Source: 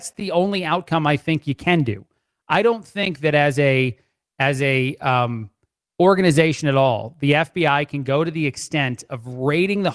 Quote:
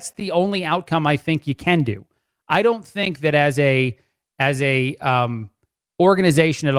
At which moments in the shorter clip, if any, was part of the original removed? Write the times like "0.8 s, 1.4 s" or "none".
none